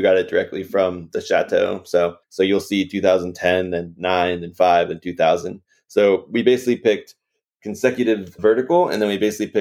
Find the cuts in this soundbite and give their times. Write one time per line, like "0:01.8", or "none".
0:02.2